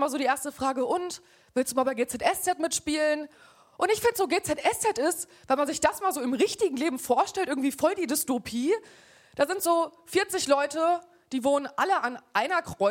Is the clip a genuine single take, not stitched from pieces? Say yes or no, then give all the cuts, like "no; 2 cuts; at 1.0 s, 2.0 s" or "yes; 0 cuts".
yes; 0 cuts